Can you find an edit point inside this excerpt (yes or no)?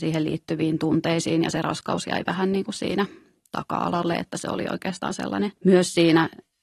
yes